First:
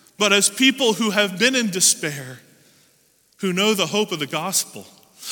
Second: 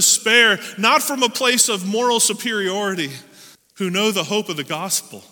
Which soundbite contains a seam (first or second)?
second